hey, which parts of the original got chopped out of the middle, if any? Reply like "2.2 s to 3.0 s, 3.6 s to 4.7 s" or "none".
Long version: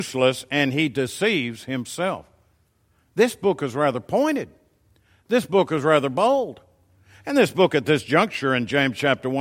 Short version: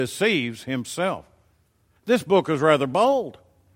3.0 s to 5.2 s